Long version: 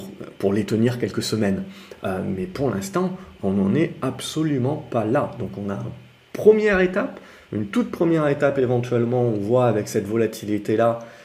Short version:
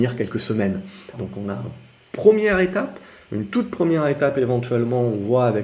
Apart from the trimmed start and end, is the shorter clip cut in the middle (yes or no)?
yes